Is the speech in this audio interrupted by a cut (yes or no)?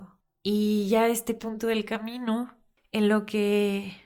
no